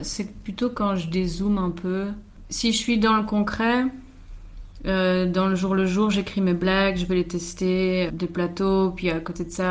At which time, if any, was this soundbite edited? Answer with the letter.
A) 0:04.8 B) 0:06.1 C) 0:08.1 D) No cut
C